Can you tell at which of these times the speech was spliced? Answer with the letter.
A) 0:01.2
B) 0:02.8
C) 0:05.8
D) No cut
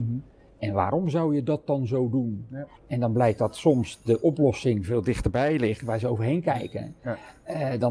B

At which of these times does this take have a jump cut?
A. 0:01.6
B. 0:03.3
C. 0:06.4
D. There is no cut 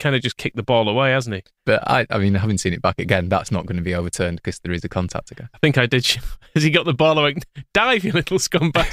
A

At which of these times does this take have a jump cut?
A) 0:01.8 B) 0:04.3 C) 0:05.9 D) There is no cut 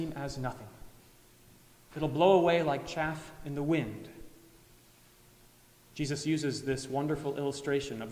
D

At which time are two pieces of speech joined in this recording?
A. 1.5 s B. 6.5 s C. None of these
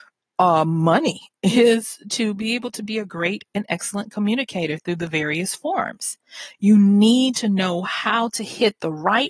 B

